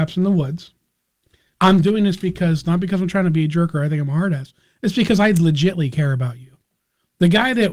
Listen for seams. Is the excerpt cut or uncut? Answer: cut